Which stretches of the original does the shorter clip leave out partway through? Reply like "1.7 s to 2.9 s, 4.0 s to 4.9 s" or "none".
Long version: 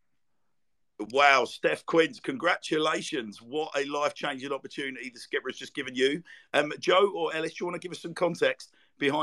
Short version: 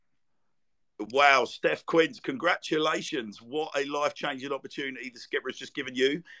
none

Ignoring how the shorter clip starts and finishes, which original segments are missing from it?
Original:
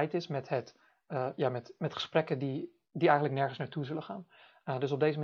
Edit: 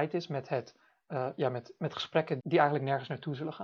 2.4 s to 2.9 s

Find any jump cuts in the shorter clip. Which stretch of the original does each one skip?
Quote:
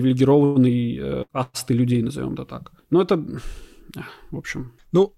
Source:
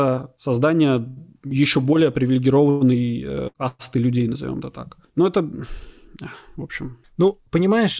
none

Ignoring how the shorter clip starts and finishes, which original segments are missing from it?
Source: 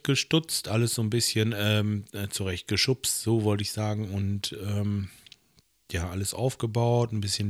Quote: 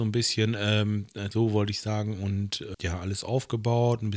2.3 s to 3.2 s, 4.7 s to 5.8 s

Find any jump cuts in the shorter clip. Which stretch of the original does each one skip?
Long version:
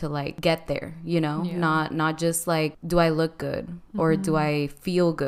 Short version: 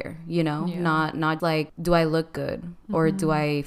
2.2 s to 2.4 s

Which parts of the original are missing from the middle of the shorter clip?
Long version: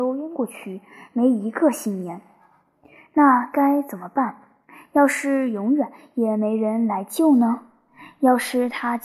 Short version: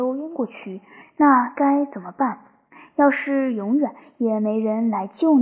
1.0 s to 3.0 s

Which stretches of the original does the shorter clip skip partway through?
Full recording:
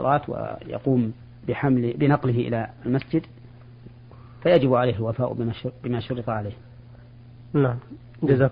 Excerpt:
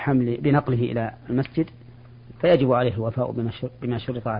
3.9 s to 4.4 s

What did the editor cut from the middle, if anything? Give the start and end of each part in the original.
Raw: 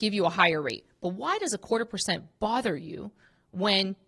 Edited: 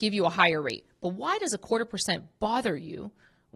none

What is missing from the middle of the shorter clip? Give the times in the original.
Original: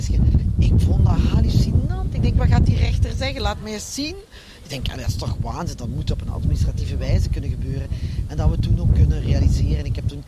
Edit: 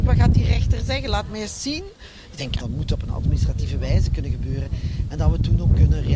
4.9 s to 5.8 s

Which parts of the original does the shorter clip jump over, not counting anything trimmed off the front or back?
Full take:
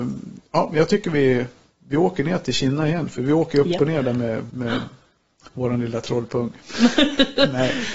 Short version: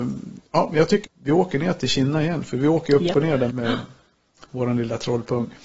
1.0 s to 1.7 s, 4.1 s to 4.5 s

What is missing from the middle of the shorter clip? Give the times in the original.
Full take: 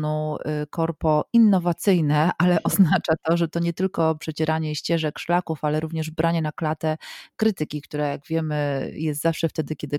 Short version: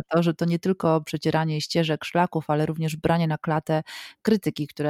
none

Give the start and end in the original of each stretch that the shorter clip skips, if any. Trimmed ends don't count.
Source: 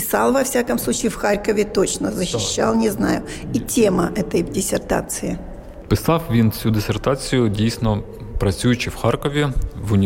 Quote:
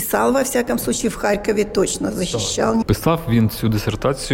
2.8 s to 5.8 s

